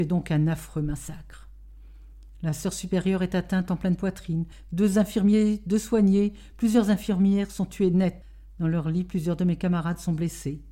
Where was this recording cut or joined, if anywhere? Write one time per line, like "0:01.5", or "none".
none